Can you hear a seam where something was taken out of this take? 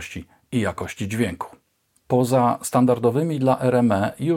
no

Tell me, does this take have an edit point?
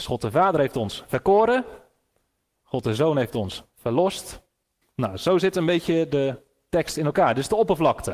yes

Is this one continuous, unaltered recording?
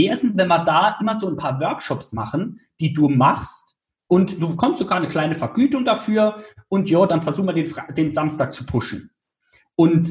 yes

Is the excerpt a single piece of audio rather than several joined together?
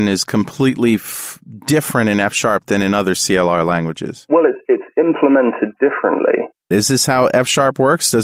no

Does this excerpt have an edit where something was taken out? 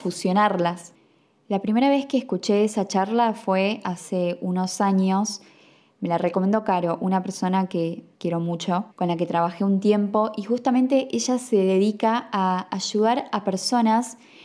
yes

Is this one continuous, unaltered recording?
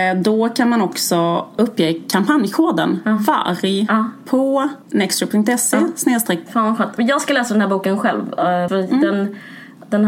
no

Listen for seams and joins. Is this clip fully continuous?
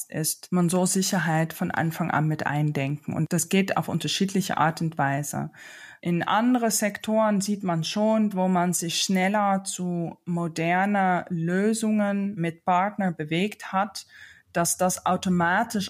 no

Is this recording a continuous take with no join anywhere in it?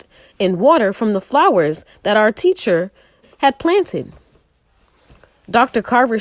no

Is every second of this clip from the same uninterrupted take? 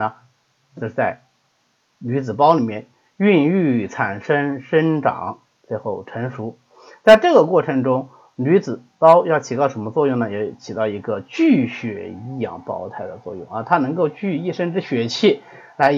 yes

